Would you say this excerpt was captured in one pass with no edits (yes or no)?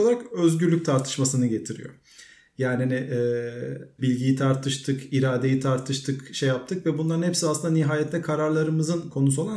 no